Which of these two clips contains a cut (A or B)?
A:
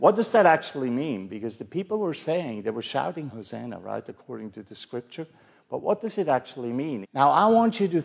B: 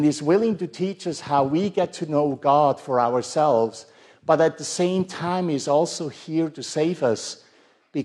A